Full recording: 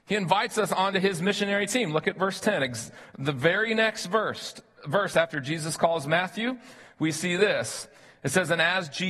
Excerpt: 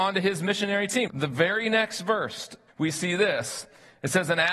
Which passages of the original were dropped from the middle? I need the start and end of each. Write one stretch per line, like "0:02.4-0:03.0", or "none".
0:01.9-0:03.1
0:04.7-0:06.9